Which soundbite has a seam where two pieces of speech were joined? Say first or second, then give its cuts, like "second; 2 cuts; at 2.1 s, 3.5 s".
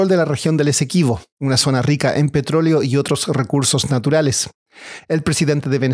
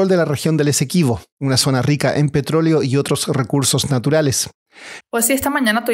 second; 1 cut; at 5.0 s